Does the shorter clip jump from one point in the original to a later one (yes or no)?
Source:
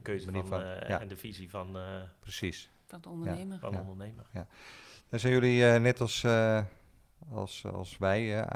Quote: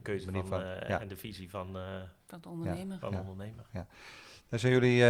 yes